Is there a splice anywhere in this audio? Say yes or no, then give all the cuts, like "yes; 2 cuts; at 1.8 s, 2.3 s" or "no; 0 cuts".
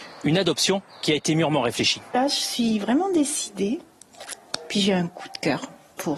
no; 0 cuts